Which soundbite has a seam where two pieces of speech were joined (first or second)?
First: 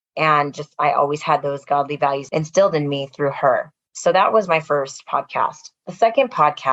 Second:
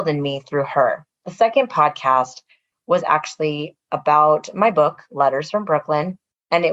second